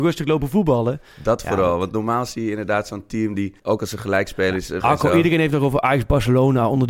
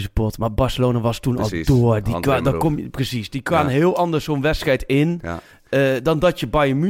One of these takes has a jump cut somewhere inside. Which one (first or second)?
first